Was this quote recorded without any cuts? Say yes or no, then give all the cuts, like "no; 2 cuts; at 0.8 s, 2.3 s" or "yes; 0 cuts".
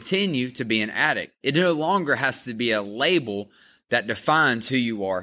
yes; 0 cuts